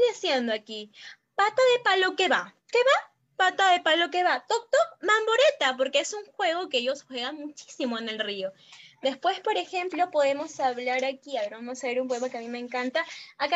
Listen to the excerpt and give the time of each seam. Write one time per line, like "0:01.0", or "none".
none